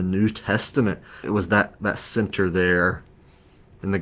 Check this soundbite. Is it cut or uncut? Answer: cut